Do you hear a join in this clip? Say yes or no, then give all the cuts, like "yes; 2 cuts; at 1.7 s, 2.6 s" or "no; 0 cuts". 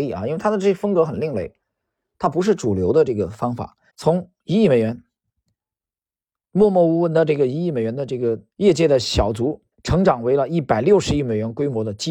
yes; 3 cuts; at 3.9 s, 8.5 s, 9.7 s